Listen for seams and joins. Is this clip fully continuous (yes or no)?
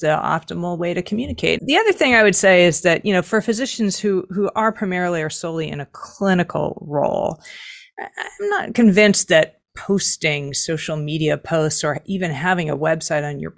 no